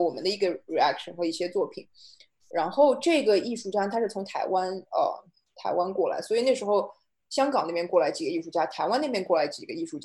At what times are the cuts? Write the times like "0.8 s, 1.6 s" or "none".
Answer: none